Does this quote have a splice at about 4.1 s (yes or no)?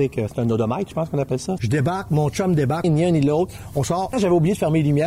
yes